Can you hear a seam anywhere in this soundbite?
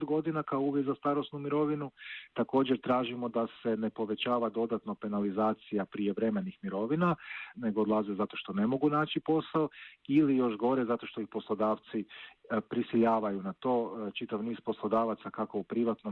yes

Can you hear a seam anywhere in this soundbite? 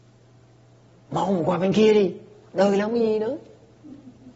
no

